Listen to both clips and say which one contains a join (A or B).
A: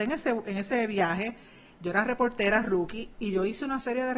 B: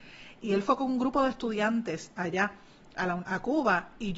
B